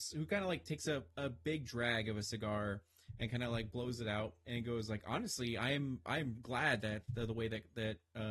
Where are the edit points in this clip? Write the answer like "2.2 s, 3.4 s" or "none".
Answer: 4.4 s, 6.3 s